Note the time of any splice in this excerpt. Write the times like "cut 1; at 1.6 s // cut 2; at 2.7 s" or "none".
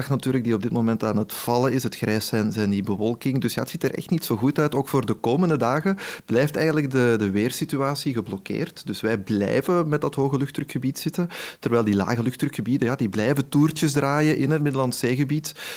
none